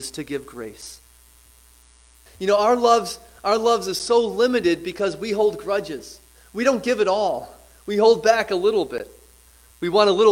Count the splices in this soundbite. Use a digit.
1